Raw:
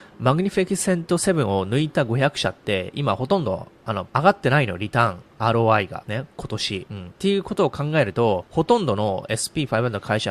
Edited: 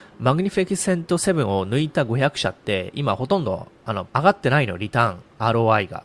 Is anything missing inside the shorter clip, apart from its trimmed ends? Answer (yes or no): no